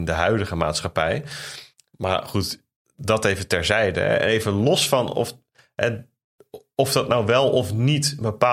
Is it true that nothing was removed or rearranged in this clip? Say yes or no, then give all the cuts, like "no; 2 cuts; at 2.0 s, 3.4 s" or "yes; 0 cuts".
yes; 0 cuts